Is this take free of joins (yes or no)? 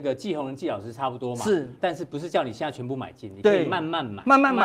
no